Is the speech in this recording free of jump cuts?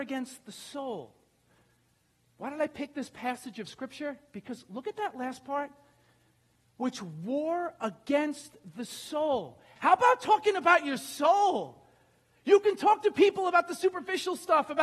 no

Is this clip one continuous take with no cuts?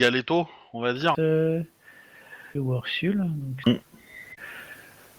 no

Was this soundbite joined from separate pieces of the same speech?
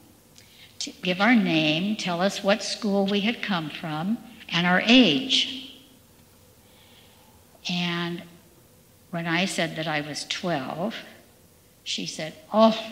no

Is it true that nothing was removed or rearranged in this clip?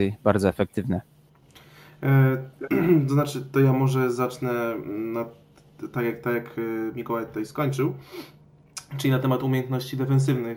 yes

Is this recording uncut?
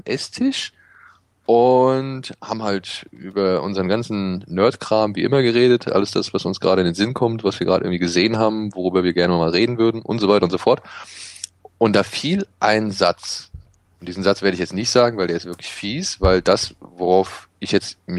yes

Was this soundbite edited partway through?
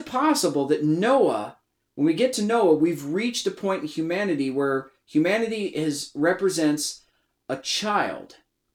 no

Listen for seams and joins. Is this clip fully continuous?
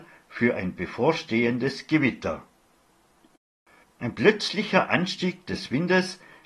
no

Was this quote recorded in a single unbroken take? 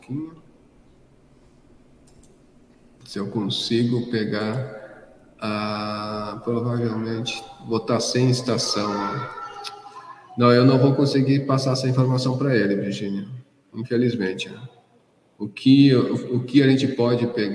yes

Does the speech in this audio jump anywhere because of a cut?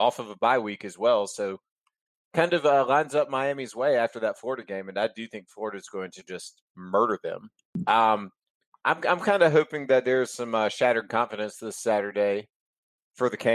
yes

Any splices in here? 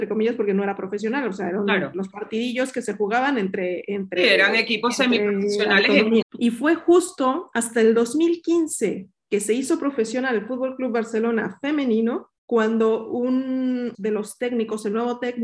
yes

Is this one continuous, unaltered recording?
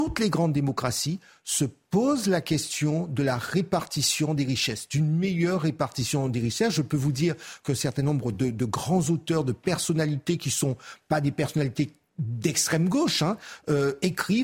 yes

